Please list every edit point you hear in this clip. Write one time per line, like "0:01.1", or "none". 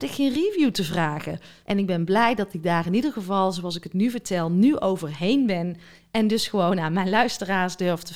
0:01.6